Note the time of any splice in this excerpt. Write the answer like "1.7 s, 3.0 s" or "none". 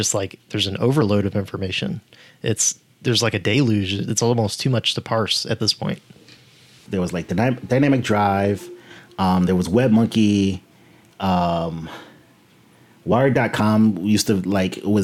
6.9 s